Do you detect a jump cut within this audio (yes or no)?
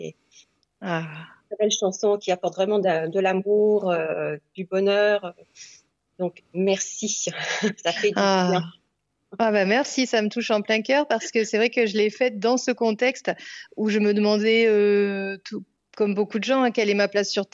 no